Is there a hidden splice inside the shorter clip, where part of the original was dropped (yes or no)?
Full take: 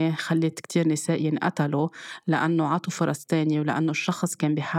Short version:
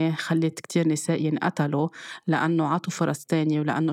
no